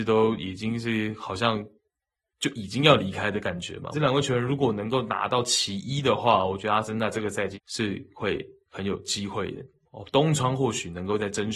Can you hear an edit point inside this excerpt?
yes; 3 cuts; at 3.9 s, 7.5 s, 9.8 s

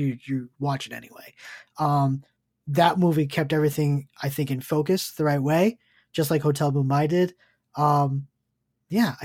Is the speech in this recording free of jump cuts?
yes; 0 cuts

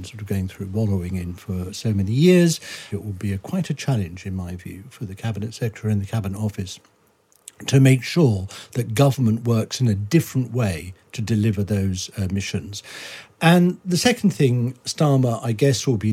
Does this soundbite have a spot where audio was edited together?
yes; 1 cut; at 2.9 s

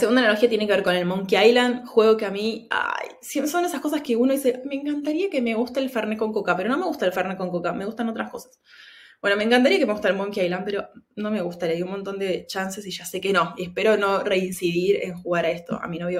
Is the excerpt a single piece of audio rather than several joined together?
yes; 0 cuts

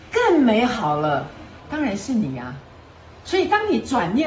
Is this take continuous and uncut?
no; 1 cut; at 1.6 s

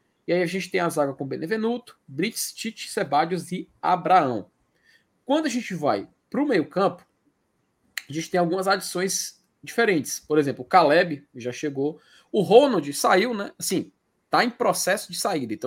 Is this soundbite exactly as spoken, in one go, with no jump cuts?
yes; 0 cuts

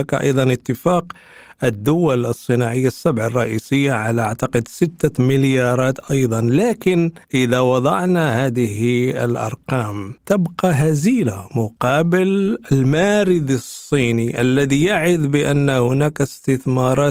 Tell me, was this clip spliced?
yes; 2 cuts; at 7.2 s, 10.2 s

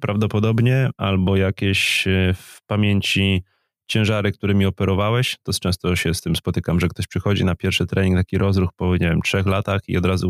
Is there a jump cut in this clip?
no; 0 cuts

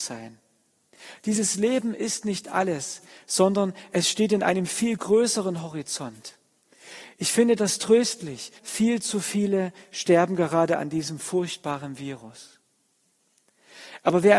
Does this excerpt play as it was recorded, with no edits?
no; 1 cut; at 8.6 s

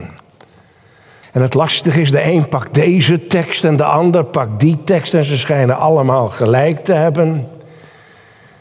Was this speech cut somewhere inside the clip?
yes; 1 cut; at 1.2 s

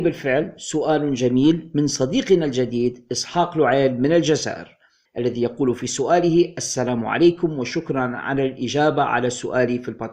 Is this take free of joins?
yes; 0 cuts

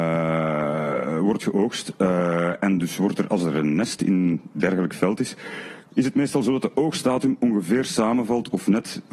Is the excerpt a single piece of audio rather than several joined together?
no; 1 cut; at 5.9 s

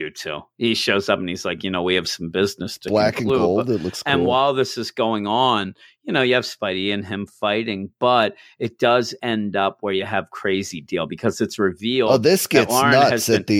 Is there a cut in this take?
no; 0 cuts

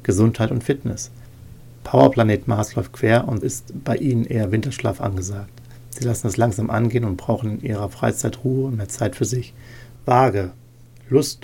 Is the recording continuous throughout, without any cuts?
no; 2 cuts; at 3.4 s, 10.0 s

